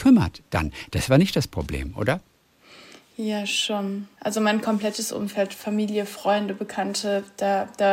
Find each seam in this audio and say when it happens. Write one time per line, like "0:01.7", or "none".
0:04.2